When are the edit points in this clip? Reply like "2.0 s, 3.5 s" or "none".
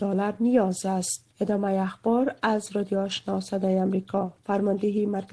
1.3 s